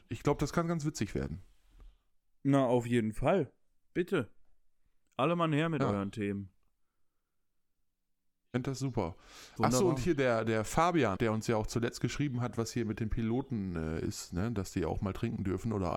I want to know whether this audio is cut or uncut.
cut